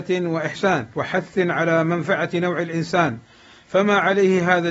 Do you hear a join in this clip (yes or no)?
yes